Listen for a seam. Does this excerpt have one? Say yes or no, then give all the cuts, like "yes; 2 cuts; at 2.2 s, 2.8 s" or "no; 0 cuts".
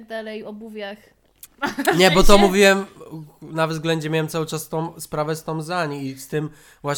yes; 1 cut; at 1.5 s